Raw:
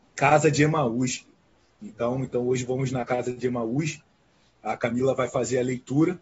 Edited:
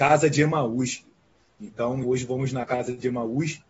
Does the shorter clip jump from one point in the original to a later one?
yes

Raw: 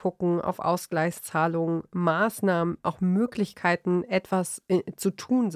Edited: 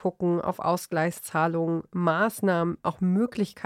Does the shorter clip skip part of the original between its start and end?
no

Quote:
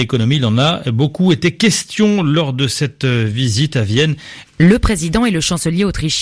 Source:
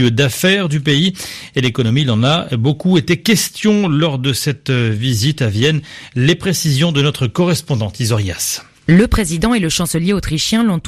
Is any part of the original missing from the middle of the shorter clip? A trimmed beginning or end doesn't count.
yes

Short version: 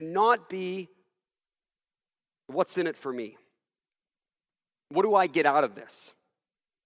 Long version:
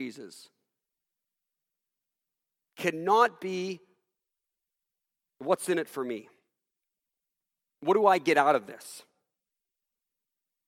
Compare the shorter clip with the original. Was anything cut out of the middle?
no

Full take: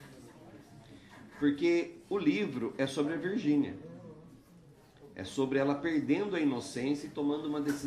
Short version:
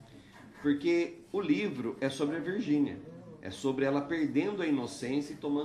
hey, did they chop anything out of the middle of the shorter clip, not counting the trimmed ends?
yes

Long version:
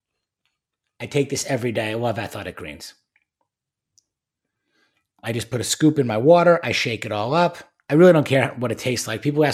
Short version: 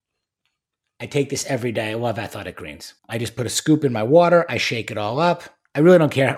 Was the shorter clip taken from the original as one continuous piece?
no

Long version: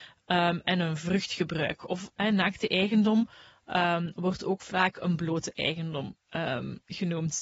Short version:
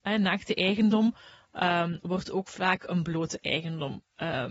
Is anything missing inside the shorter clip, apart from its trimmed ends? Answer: no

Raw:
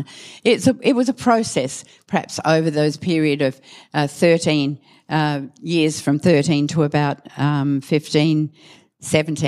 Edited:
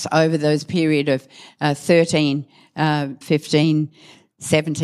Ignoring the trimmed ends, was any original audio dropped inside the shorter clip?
yes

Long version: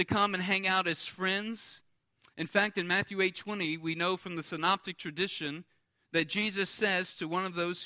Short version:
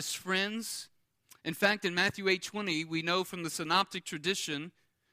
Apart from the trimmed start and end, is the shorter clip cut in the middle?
no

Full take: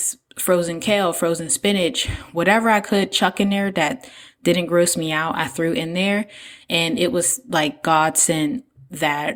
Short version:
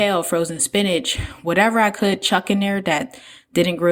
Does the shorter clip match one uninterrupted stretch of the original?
yes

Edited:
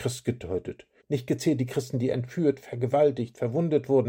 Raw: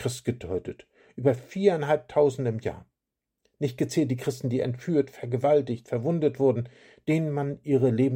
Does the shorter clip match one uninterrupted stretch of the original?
no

